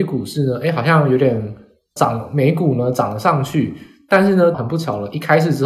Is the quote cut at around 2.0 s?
yes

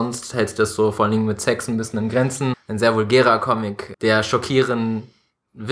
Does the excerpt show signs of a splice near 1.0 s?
no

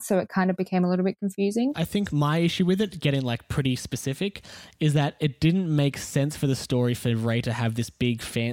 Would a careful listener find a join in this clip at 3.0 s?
no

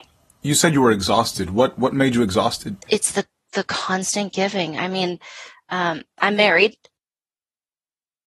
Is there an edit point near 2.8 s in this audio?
yes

